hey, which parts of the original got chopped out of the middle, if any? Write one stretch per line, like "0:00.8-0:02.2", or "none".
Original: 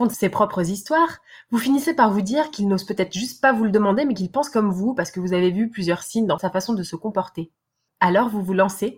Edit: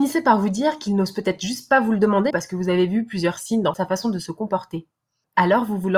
0:04.0-0:04.9

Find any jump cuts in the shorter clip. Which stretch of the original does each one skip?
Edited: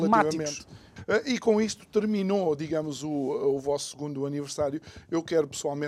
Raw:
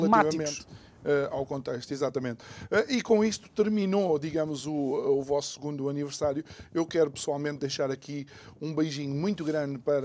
0:01.0-0:02.6

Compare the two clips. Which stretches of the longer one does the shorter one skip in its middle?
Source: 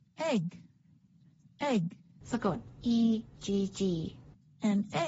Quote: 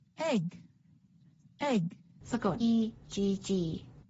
0:02.6-0:02.9

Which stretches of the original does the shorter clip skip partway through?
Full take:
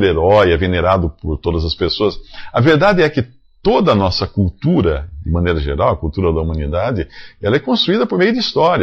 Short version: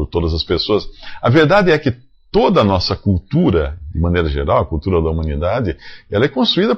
none

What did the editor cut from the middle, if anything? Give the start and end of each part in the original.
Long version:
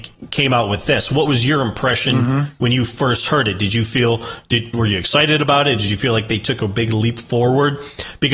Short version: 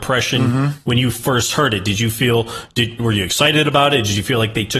none

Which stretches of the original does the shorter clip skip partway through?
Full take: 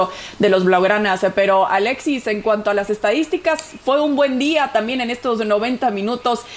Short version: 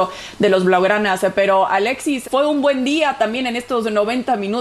0:02.2-0:03.8

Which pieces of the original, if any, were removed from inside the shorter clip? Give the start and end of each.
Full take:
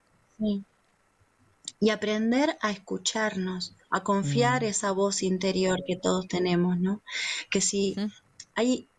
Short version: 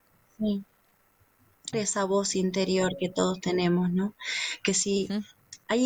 0:01.7-0:04.6

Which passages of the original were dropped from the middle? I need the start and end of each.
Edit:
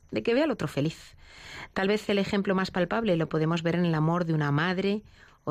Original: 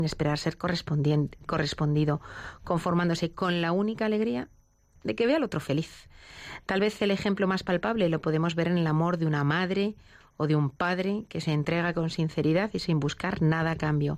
none

